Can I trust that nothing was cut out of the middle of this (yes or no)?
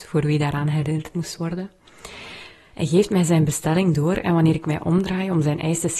no